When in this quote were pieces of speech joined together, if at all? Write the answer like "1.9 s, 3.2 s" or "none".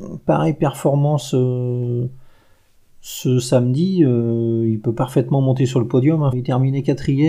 6.3 s